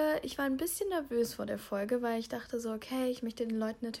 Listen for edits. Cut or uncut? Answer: uncut